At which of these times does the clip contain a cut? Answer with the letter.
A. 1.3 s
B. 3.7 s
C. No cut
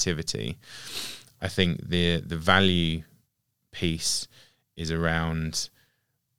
C